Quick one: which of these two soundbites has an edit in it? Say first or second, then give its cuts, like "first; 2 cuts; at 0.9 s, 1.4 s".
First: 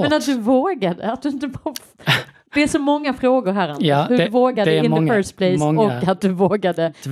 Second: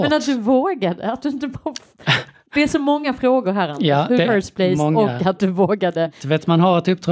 second; 1 cut; at 4.3 s